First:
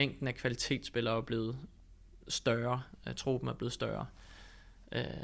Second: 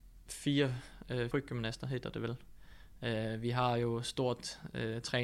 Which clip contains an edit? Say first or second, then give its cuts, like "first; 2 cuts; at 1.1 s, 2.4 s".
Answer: second; 1 cut; at 1.3 s